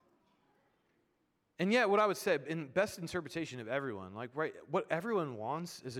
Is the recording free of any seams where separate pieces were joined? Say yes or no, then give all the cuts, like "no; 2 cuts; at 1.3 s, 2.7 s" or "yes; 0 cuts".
yes; 0 cuts